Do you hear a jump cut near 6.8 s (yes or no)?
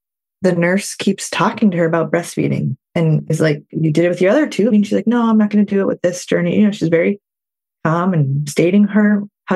no